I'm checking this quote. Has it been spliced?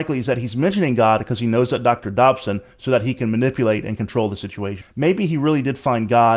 yes; 2 cuts; at 2.0 s, 4.8 s

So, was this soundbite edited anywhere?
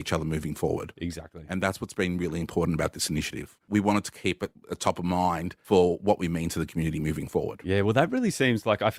yes; 1 cut; at 3.6 s

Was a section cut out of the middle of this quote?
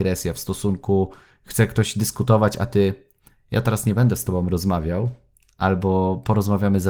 no; 0 cuts

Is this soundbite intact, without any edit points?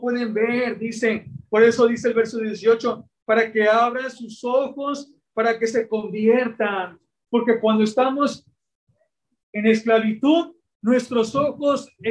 yes; 0 cuts

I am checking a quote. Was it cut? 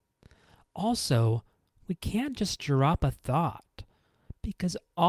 no; 0 cuts

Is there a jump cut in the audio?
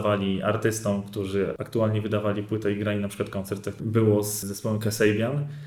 no; 0 cuts

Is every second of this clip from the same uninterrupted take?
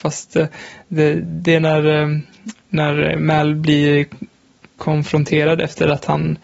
yes; 0 cuts

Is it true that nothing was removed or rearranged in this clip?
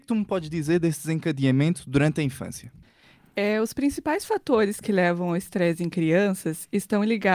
yes; 0 cuts

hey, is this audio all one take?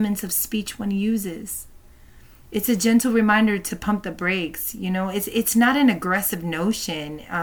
yes; 0 cuts

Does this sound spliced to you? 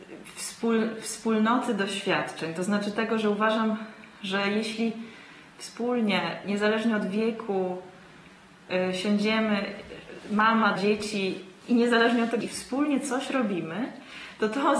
yes; 2 cuts; at 10.8 s, 12.4 s

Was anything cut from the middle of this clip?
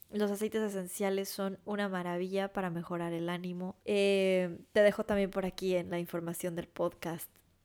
yes; 1 cut; at 3.8 s

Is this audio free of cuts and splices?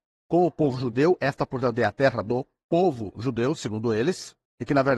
yes; 0 cuts

